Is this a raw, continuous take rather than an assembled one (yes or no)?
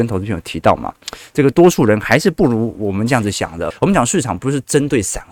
no